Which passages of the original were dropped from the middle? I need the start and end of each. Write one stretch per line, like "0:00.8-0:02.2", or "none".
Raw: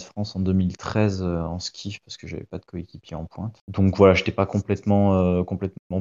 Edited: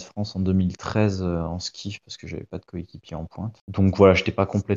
none